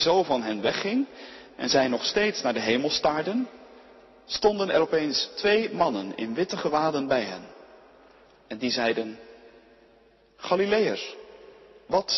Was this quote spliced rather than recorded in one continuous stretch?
no; 0 cuts

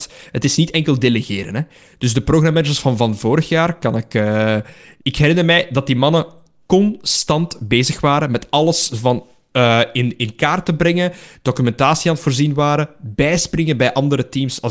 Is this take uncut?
yes; 0 cuts

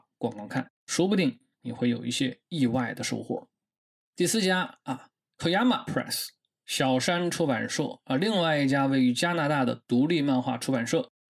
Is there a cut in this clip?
no; 0 cuts

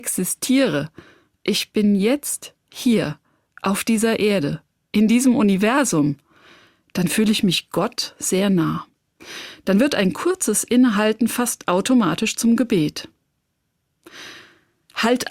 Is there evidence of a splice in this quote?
no; 0 cuts

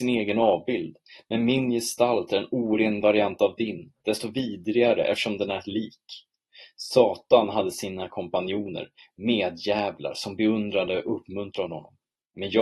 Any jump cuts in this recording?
no; 0 cuts

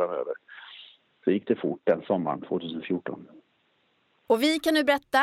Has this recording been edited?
no; 0 cuts

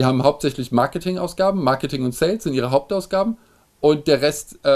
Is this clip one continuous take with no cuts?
yes; 0 cuts

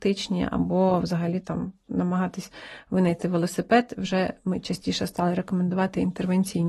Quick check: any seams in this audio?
no; 0 cuts

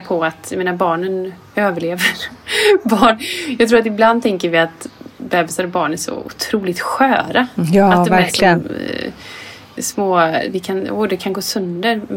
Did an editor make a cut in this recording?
no; 0 cuts

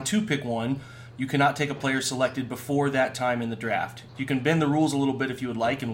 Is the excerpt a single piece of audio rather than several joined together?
no; 1 cut; at 4.1 s

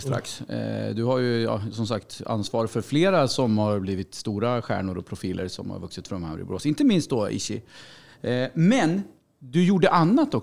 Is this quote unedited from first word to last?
yes; 0 cuts

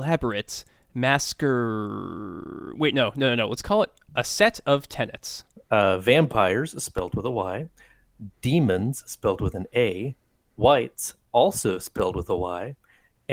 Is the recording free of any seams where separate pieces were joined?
no; 1 cut; at 5.5 s

